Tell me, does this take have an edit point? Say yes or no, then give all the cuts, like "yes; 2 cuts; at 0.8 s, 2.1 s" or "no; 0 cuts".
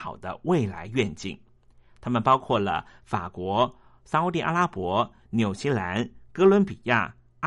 no; 0 cuts